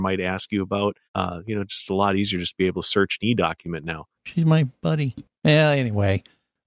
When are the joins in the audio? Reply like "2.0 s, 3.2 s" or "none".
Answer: 1.1 s, 4.1 s